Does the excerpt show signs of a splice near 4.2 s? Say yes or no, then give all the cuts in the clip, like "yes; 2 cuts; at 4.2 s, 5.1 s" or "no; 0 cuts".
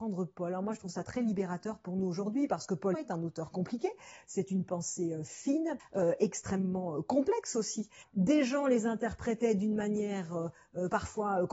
no; 3 cuts; at 2.9 s, 5.8 s, 8.0 s